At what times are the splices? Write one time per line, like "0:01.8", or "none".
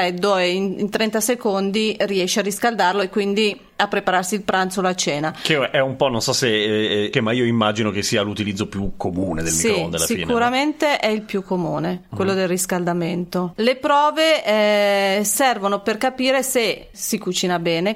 0:07.1
0:13.5
0:16.9